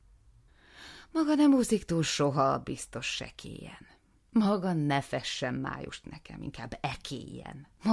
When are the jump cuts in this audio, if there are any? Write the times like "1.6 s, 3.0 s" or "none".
none